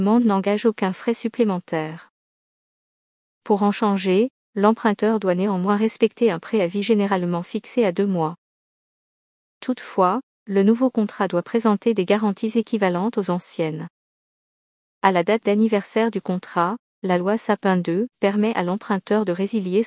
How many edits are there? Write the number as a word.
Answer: two